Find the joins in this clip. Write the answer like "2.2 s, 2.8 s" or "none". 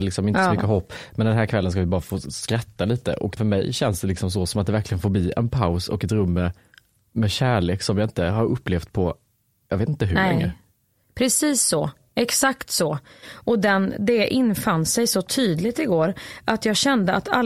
none